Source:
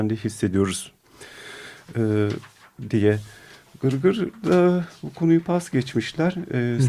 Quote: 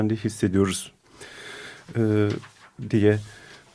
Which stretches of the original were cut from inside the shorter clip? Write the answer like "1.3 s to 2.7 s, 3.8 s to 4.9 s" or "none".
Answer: none